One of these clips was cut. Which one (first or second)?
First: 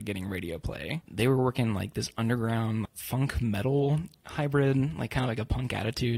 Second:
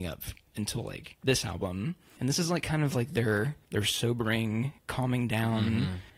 first